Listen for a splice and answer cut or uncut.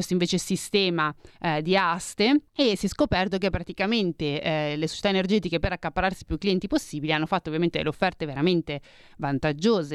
cut